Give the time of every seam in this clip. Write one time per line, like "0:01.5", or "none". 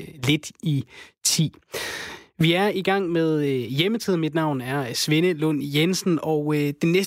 none